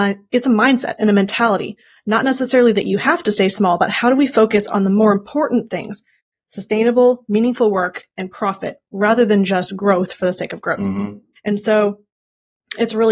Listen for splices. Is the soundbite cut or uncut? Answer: cut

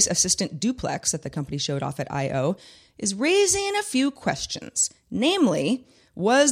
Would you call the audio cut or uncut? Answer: uncut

